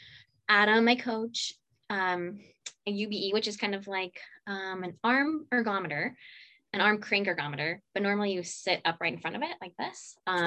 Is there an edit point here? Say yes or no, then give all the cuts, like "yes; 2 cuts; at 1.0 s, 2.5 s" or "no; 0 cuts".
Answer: yes; 1 cut; at 2.8 s